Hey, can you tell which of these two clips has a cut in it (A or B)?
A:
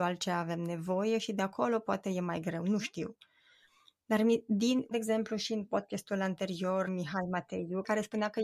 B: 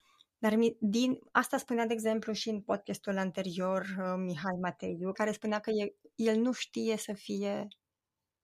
A